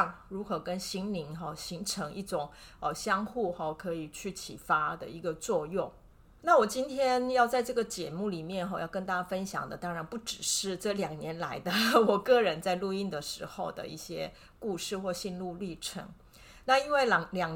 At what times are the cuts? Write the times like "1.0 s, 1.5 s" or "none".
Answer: none